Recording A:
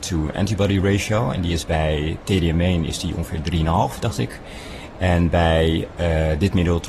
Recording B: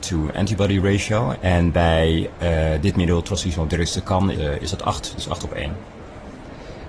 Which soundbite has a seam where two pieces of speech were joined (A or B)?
B